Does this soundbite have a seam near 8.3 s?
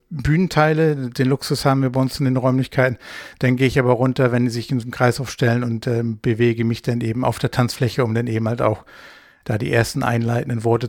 no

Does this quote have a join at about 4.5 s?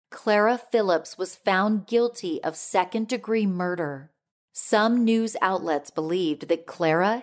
yes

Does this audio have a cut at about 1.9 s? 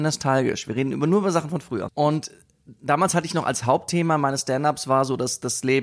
yes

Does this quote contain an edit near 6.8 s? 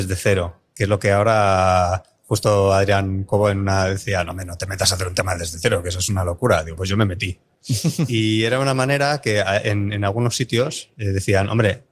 yes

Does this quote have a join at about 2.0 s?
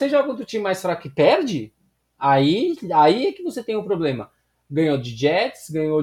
no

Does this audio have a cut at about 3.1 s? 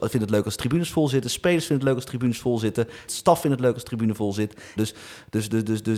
yes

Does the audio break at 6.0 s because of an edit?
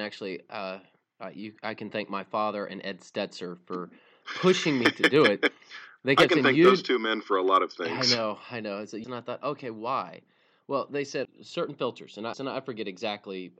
no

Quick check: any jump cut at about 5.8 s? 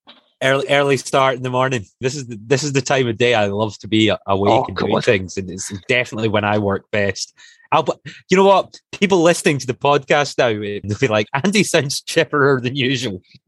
no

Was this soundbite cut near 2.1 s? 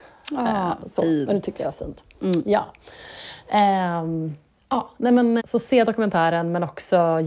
no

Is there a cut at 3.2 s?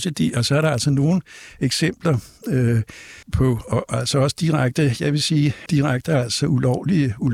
yes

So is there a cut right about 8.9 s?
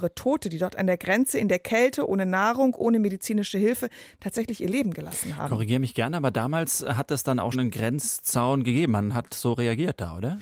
no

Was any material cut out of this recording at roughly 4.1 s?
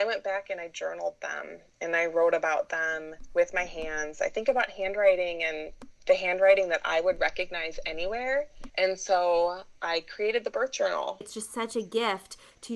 no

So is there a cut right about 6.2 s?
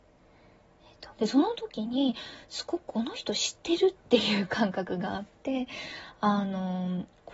no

